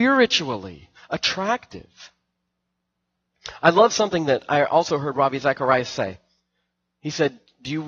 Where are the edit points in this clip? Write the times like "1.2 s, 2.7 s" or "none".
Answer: none

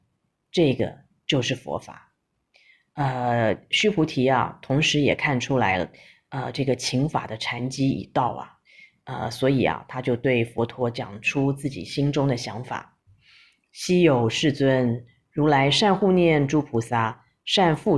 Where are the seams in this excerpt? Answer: none

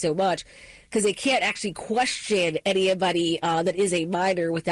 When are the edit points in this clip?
none

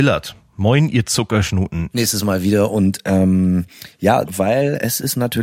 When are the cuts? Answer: 1.9 s, 4.2 s

